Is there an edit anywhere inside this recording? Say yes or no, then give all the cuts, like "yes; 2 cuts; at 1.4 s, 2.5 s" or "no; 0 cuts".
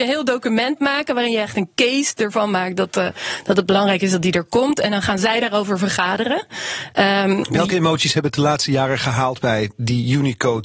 no; 0 cuts